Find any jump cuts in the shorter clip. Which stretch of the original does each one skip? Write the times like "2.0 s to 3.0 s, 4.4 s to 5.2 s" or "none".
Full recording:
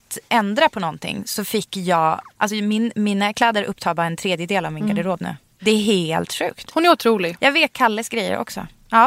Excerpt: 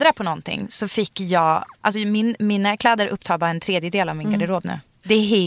none